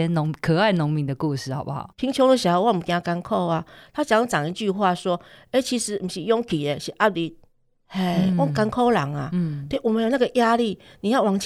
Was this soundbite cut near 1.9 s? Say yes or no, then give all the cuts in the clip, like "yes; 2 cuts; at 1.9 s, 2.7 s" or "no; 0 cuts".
yes; 1 cut; at 1.9 s